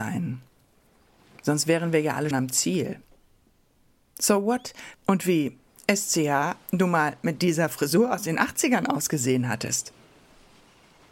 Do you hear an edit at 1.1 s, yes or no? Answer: no